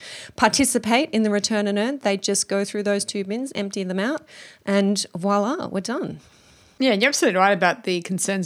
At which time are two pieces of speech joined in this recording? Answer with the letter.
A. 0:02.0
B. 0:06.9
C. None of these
C